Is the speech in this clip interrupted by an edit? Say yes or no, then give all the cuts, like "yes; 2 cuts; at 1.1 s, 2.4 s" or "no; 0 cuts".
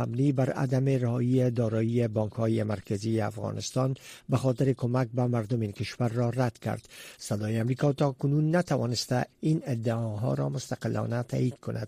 yes; 1 cut; at 7.2 s